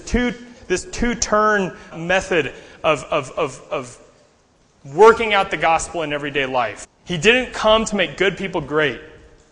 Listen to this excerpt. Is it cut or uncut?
cut